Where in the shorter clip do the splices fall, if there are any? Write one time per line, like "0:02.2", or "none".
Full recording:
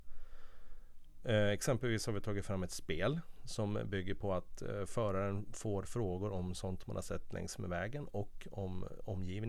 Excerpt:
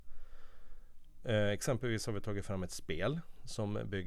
none